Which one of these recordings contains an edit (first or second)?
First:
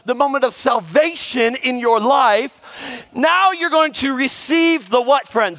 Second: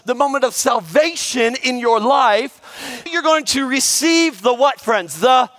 second